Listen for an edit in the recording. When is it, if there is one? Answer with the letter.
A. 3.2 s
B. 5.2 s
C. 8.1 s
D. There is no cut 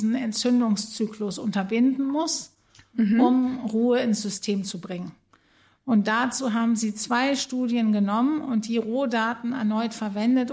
D